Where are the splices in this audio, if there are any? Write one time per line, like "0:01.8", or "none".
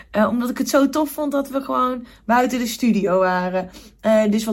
none